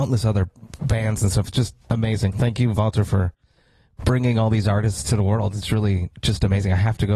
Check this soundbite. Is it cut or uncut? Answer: uncut